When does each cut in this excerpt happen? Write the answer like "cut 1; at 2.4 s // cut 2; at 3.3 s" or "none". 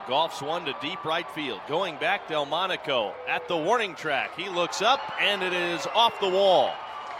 none